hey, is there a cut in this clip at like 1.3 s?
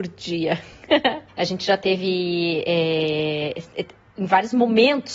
yes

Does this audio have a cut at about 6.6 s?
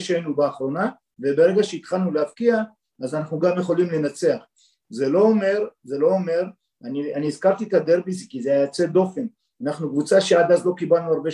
no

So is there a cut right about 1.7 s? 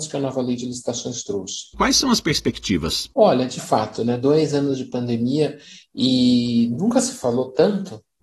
yes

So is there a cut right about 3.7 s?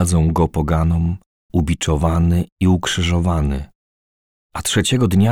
no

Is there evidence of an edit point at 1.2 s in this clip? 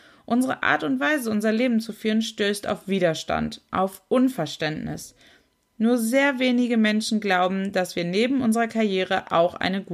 no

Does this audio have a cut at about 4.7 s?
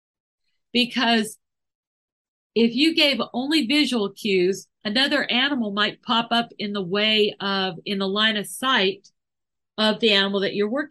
no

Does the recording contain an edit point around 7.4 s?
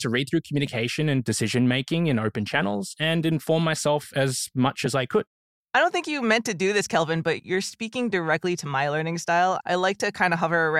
yes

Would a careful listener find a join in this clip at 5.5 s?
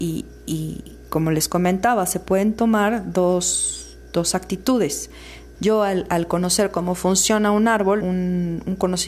yes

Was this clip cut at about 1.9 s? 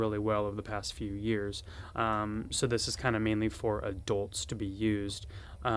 yes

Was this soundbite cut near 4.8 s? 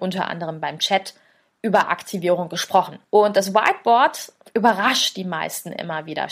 no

